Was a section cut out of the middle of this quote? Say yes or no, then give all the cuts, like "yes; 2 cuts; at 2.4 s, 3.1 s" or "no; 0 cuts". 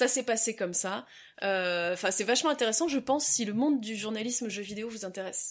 no; 0 cuts